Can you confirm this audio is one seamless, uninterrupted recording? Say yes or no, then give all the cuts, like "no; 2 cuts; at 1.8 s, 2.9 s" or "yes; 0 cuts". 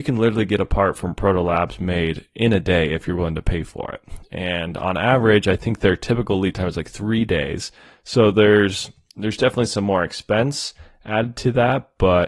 yes; 0 cuts